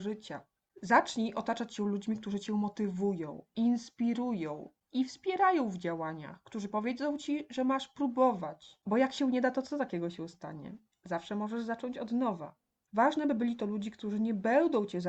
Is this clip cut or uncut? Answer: uncut